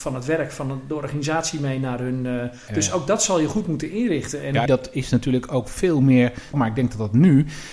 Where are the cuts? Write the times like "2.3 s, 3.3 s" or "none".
2.7 s, 4.7 s, 6.5 s